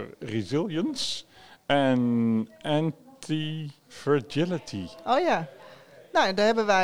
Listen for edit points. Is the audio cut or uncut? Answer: cut